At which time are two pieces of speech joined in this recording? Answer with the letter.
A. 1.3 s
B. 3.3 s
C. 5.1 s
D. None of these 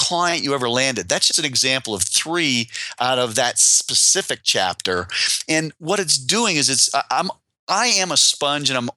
A